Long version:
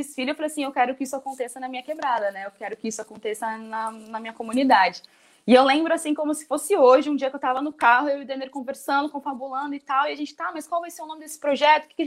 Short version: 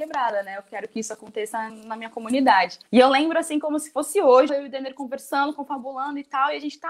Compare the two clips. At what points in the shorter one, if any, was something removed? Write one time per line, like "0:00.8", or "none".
0:01.7
0:02.9
0:04.5